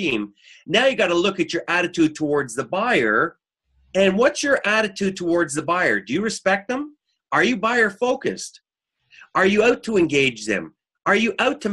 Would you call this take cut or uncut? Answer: uncut